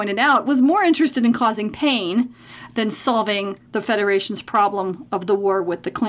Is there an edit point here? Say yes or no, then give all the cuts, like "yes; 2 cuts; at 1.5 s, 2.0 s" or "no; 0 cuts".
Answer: yes; 1 cut; at 3.7 s